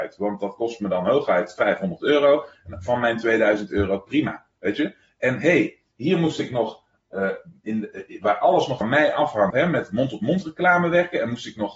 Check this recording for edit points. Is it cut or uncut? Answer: cut